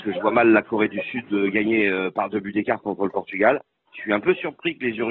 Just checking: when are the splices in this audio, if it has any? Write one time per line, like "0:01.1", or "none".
0:03.9